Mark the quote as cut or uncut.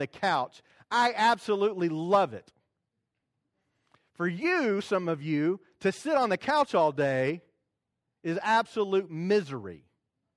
uncut